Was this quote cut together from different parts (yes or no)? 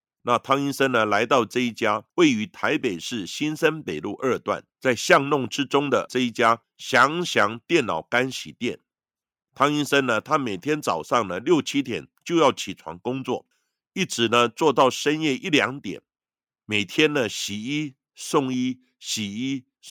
no